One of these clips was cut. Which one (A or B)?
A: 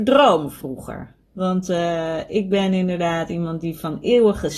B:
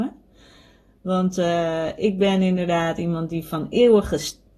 A